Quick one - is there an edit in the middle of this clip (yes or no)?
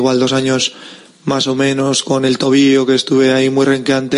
no